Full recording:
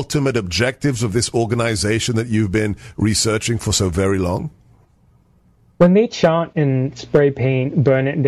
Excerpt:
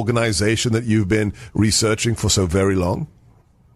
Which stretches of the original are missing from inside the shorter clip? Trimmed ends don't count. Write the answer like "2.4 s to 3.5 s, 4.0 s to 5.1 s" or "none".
none